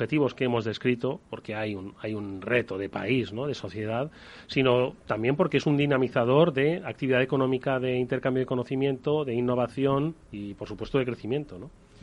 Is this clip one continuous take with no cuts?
yes; 0 cuts

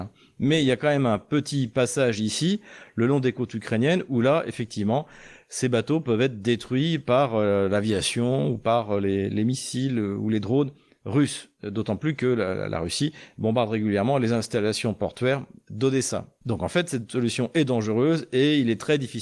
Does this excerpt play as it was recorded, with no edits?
yes; 0 cuts

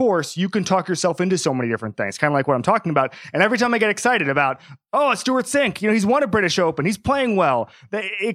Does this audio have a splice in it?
no; 0 cuts

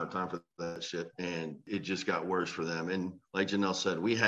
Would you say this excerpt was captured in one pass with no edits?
no; 1 cut; at 1.1 s

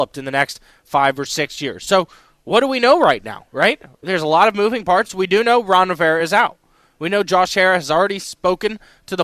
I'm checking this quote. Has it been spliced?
no; 0 cuts

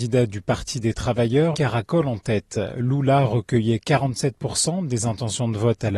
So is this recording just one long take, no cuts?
no; 1 cut; at 1.5 s

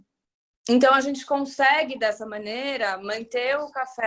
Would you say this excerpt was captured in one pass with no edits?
yes; 0 cuts

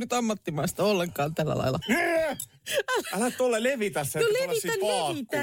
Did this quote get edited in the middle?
yes; 1 cut; at 1.8 s

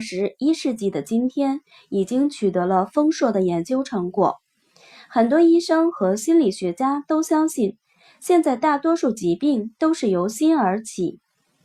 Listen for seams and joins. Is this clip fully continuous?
yes; 0 cuts

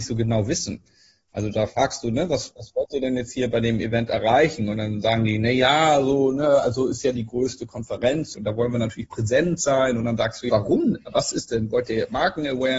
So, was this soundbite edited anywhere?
yes; 2 cuts; at 8.3 s, 10.5 s

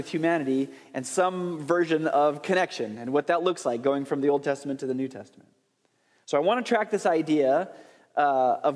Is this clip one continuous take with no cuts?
yes; 0 cuts

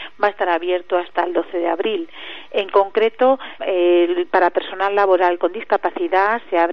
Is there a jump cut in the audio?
yes; 1 cut; at 3.6 s

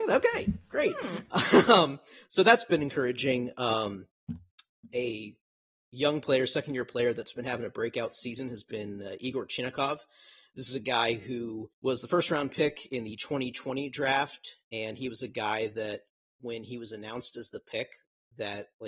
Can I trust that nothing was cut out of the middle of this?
no; 1 cut; at 11.7 s

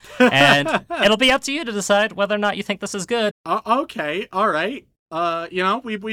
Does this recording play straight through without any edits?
no; 1 cut; at 3.3 s

